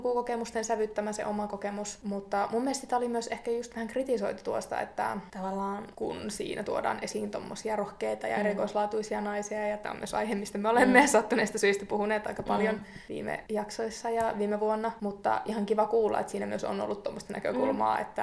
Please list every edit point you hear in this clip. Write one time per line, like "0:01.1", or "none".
none